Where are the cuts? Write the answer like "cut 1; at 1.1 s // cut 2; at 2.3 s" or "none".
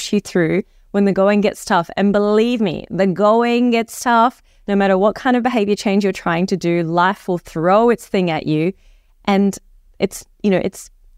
none